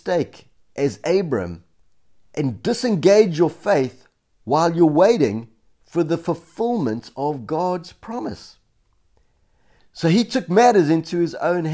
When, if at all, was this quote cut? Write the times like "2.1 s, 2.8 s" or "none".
9.8 s